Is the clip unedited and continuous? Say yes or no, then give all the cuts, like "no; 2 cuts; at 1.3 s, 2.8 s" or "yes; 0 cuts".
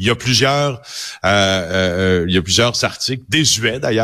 yes; 0 cuts